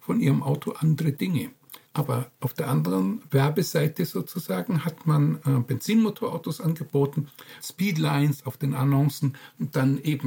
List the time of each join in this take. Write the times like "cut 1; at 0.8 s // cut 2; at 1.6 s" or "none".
cut 1; at 1.9 s // cut 2; at 3.2 s // cut 3; at 7.6 s